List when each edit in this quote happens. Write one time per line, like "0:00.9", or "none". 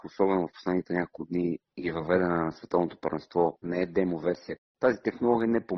0:03.6